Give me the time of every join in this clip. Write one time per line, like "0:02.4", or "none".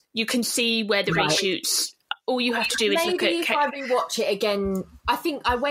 0:02.2